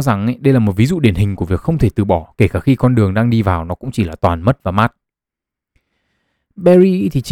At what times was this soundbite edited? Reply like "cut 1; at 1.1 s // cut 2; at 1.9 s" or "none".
none